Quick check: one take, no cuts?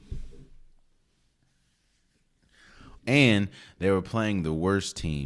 no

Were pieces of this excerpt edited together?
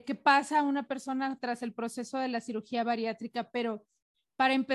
no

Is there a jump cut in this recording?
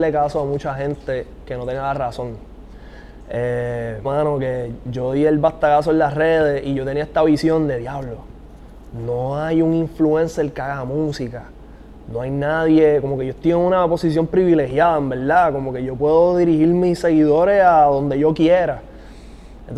yes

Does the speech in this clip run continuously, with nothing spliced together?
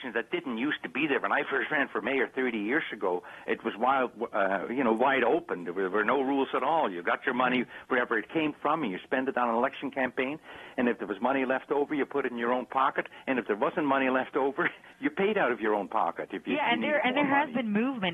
yes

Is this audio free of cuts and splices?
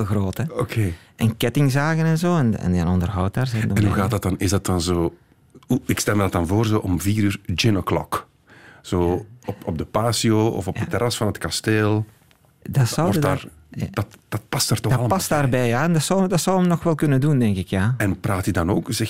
yes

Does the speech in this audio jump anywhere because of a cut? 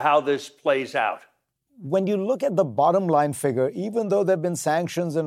no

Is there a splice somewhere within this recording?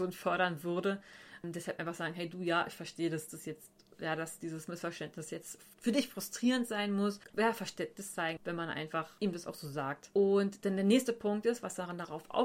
yes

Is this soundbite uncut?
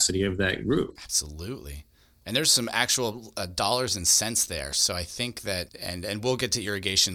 yes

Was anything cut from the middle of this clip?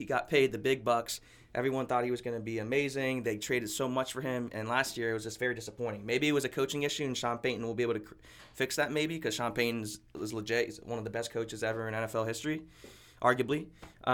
no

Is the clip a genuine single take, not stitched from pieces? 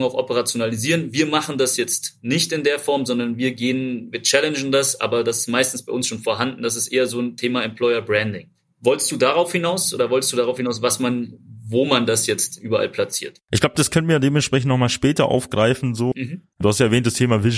no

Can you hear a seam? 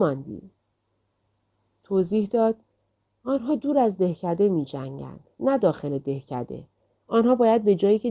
no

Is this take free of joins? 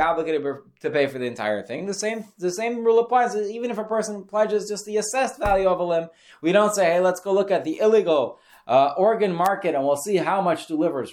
yes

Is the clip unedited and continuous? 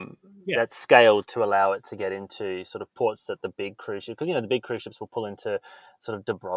yes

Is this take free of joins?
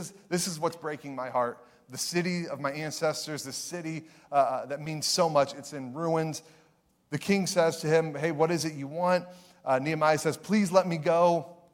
yes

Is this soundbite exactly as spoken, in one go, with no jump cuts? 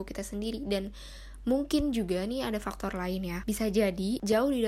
yes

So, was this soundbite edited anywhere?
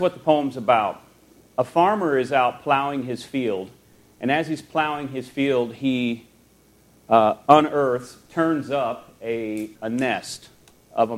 yes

